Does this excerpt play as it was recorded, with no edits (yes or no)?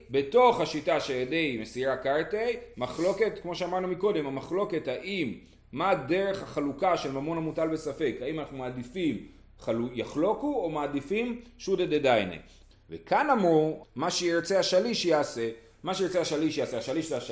no